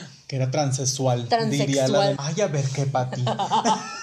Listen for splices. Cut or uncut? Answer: cut